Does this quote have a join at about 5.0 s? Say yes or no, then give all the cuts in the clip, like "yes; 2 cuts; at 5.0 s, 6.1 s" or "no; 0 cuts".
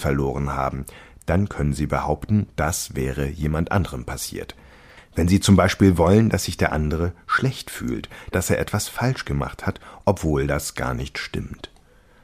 yes; 2 cuts; at 5.0 s, 8.3 s